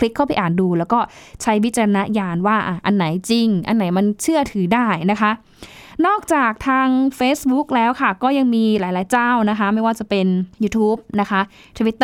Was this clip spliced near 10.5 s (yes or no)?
yes